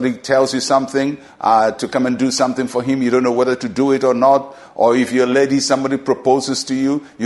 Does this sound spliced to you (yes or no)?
no